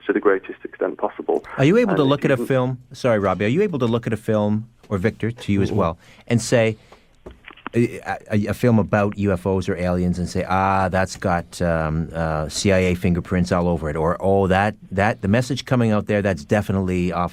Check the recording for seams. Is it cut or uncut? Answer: uncut